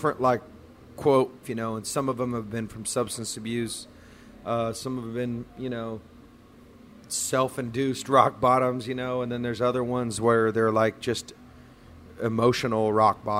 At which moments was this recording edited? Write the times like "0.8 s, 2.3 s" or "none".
1.4 s